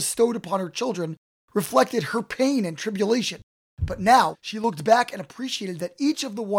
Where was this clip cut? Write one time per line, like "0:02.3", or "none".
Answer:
0:04.3